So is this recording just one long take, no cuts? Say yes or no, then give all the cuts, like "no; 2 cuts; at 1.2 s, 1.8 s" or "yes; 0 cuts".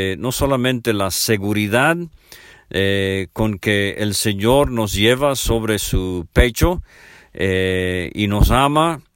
yes; 0 cuts